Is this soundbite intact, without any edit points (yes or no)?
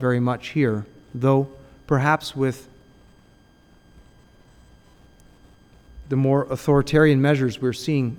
yes